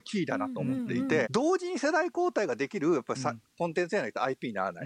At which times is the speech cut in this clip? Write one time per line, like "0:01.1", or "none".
0:01.2